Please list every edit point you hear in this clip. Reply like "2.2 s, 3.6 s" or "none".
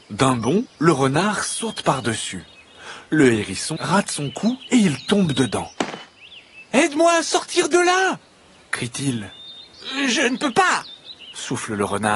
3.8 s